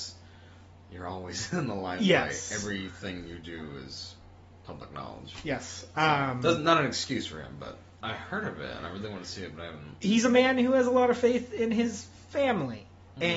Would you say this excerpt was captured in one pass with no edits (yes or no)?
no